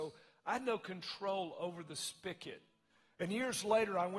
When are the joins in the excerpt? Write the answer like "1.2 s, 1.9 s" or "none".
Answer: none